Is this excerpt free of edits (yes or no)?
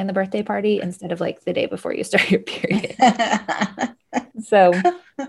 no